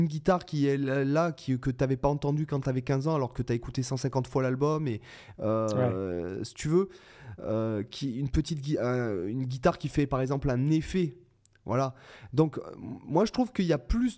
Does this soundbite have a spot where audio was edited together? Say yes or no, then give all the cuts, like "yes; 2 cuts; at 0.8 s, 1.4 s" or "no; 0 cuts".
no; 0 cuts